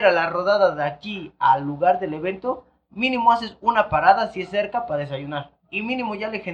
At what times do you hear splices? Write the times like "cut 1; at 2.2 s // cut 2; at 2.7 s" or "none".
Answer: cut 1; at 5.6 s